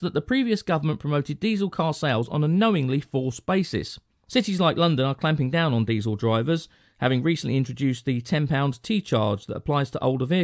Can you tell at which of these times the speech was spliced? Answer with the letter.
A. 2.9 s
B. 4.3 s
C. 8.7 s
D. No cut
B